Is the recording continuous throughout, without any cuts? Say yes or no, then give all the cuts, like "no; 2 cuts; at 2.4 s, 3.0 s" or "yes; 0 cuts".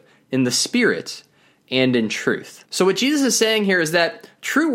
no; 1 cut; at 2.7 s